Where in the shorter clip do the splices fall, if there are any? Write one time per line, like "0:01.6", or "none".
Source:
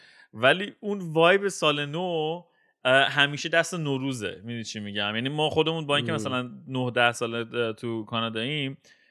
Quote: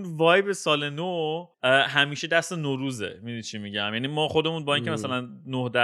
0:01.5